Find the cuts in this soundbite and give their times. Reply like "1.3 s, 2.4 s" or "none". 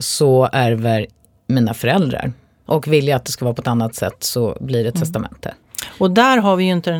2.7 s